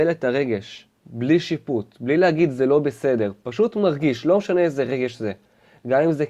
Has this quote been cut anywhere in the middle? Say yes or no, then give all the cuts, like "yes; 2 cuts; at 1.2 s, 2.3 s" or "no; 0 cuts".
yes; 1 cut; at 1.0 s